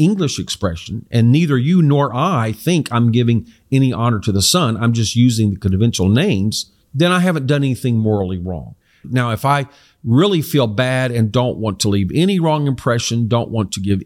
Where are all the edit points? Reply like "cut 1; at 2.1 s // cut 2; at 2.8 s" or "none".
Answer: cut 1; at 6.8 s // cut 2; at 9.0 s

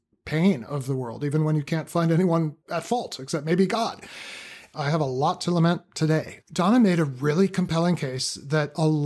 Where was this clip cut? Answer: cut 1; at 4.7 s // cut 2; at 6.4 s

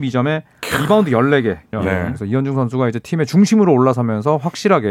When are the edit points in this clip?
cut 1; at 1.7 s

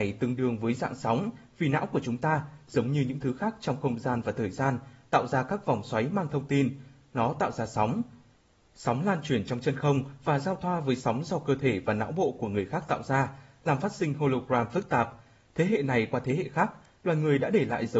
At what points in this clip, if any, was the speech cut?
none

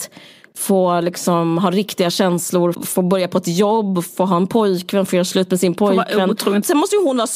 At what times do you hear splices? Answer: cut 1; at 2.7 s

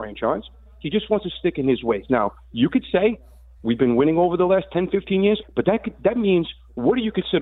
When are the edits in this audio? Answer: cut 1; at 5.4 s

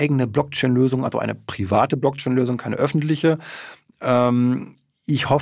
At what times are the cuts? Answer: none

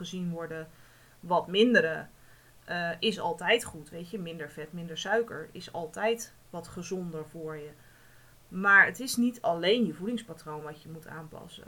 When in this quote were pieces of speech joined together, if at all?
none

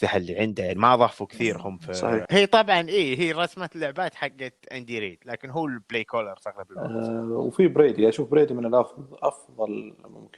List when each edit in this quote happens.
cut 1; at 2.3 s

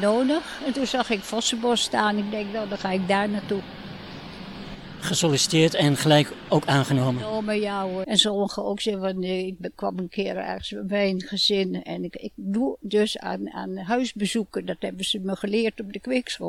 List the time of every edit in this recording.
cut 1; at 8.0 s

